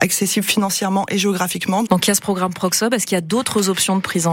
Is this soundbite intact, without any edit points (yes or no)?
no